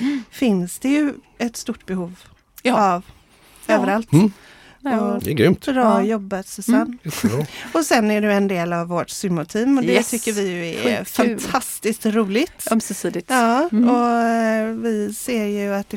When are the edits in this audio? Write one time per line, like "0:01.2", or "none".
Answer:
0:05.2

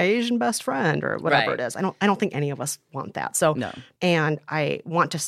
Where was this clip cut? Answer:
0:04.0

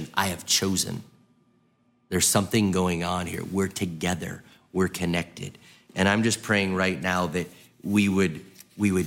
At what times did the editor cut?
none

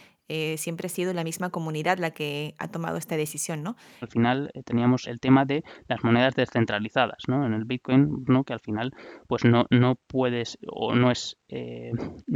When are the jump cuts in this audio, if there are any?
0:04.0
0:05.0
0:08.2

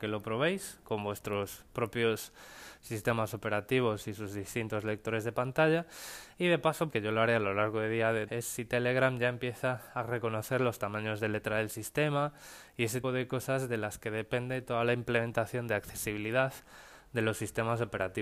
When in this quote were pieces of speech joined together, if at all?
0:06.9
0:08.3
0:13.0

